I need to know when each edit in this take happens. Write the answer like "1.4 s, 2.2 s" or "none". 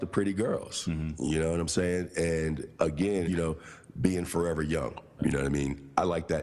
3.3 s, 5.2 s

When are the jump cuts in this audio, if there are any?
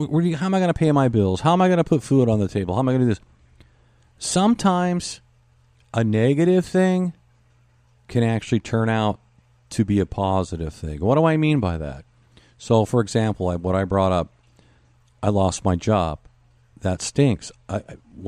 none

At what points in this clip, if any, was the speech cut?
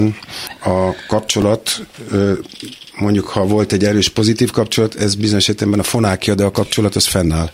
none

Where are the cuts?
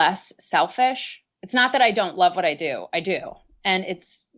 1.3 s

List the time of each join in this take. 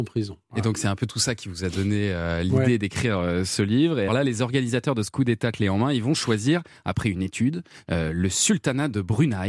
4.1 s

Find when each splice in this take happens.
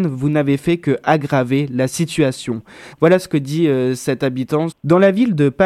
2.9 s, 4.7 s

